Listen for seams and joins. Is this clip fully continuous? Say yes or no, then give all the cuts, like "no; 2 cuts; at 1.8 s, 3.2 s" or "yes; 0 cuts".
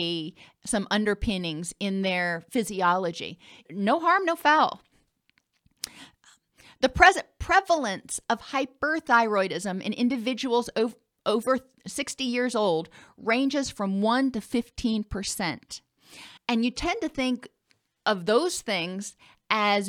no; 2 cuts; at 3.7 s, 16.4 s